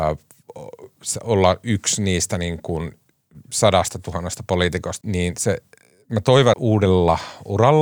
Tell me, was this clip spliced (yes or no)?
yes